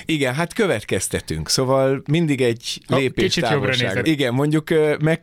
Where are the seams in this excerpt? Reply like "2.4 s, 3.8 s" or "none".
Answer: 4.0 s